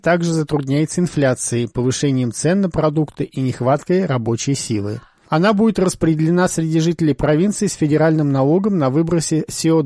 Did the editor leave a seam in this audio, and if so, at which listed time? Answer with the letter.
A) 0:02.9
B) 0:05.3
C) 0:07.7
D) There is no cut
B